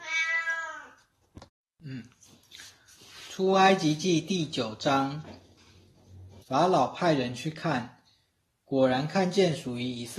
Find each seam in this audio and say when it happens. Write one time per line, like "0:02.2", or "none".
0:06.4

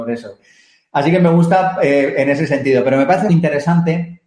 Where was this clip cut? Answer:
0:03.3

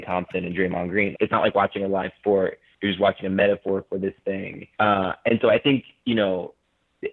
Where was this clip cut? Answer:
0:01.1
0:04.7

